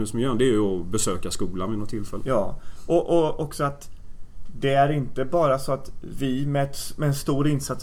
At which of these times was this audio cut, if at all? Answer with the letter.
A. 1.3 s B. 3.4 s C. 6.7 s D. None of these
D